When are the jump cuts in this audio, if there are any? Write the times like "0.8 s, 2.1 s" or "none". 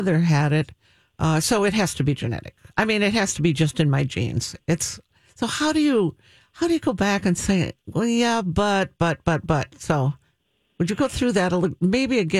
none